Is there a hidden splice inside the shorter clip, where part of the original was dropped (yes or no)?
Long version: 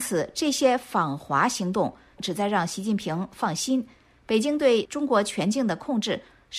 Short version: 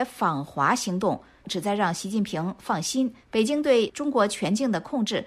yes